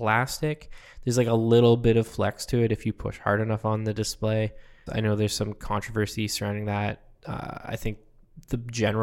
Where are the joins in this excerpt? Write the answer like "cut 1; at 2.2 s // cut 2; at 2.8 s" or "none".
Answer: cut 1; at 4.9 s